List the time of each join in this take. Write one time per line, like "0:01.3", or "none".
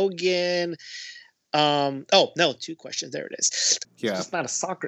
0:03.8

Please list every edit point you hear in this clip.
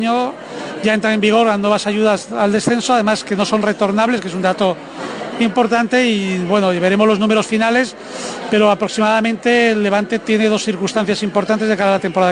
none

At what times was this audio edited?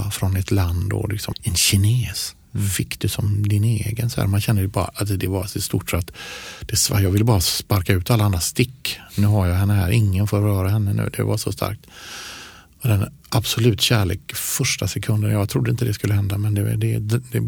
0:01.3

